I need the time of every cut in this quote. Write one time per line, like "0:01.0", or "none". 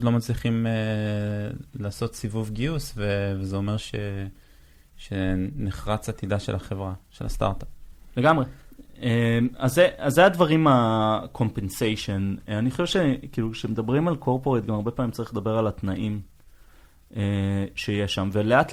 none